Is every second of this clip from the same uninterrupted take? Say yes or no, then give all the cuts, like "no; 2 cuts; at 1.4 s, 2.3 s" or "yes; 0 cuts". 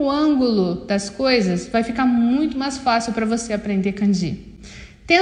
yes; 0 cuts